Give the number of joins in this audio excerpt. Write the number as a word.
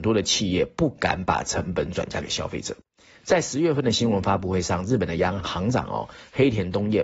one